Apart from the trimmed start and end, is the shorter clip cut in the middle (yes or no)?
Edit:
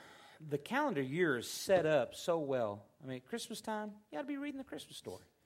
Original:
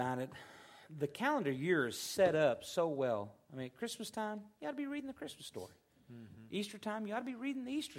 no